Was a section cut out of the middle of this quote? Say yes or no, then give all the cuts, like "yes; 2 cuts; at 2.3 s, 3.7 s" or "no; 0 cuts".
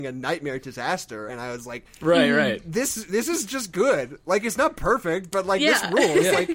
no; 0 cuts